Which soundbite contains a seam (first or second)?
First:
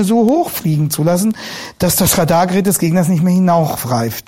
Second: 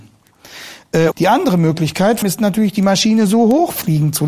second